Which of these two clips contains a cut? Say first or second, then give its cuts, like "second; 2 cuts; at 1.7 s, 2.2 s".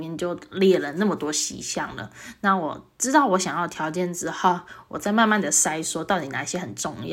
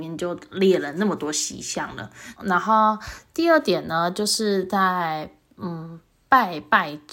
second; 1 cut; at 2.3 s